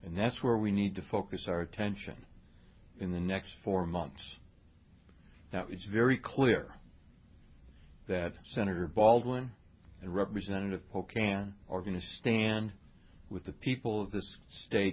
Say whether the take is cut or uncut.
cut